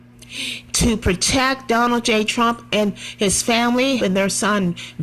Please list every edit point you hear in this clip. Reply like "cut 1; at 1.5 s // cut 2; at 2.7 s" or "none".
cut 1; at 2.3 s // cut 2; at 4.0 s